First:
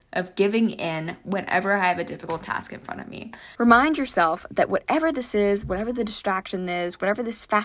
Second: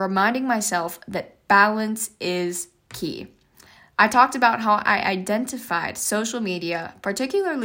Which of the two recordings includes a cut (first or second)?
first